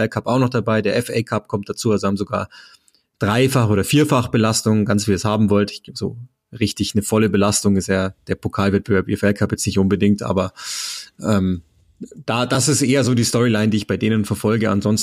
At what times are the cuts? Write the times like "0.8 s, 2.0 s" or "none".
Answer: none